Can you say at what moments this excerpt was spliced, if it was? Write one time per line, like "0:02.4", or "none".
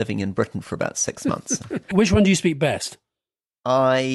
0:01.9